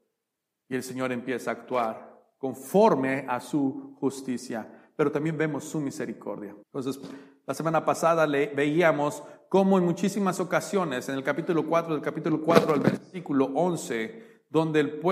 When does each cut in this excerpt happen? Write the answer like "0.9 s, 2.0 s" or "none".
6.6 s